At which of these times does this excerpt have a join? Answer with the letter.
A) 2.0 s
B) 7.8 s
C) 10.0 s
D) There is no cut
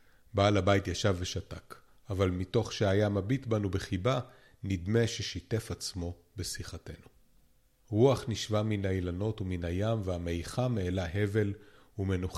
B